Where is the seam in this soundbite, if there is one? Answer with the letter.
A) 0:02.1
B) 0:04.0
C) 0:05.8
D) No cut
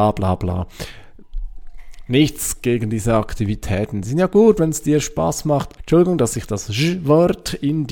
C